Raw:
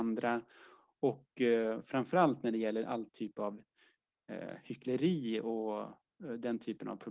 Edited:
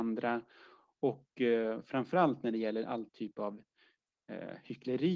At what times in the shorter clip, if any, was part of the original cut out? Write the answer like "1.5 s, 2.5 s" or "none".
none